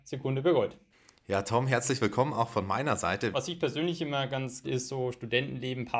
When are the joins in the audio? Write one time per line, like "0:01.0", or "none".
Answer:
0:03.3
0:04.6